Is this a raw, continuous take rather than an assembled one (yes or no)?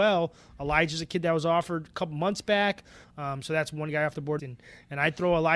no